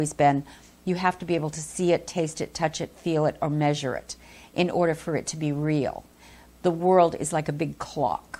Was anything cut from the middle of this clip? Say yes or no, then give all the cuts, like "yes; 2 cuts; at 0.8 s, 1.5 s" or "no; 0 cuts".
no; 0 cuts